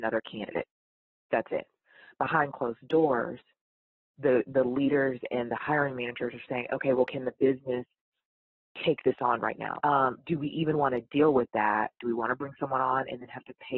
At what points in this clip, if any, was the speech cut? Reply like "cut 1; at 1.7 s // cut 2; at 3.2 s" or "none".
cut 1; at 9.8 s // cut 2; at 12.0 s